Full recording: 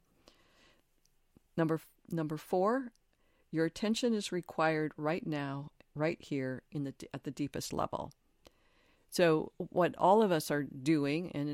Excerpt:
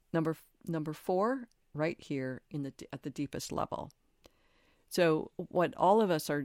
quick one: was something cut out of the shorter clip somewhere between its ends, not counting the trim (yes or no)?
yes